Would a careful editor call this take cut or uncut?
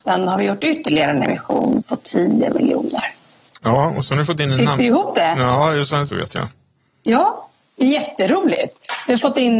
cut